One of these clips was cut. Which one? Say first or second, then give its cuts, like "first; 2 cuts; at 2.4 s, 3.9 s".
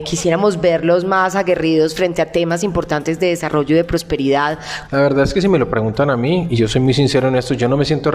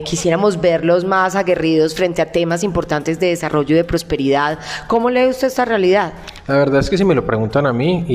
first; 2 cuts; at 4.9 s, 6.5 s